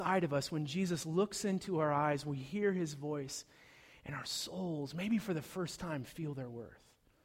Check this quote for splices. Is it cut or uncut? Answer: uncut